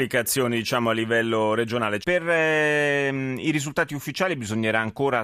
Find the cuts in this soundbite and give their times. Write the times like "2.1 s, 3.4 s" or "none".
2.0 s